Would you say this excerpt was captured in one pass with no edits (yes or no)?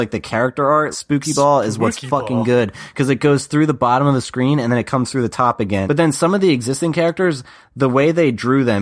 no